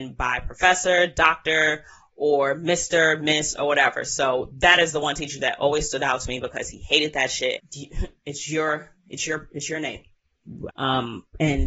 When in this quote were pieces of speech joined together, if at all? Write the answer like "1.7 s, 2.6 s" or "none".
7.6 s, 10.7 s